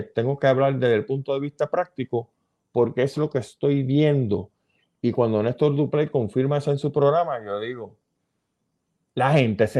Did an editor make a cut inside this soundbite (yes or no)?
no